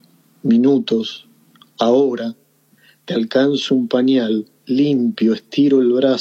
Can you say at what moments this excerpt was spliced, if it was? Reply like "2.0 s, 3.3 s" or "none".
1.7 s